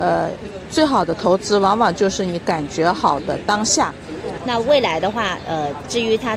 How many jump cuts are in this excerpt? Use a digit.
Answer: 1